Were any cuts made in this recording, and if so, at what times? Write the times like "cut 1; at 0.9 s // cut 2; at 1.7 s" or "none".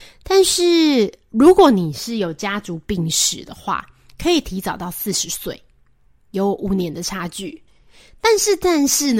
none